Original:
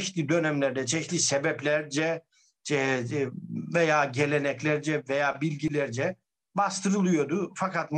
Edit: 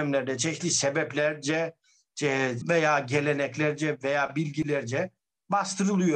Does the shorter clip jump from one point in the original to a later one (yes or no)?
yes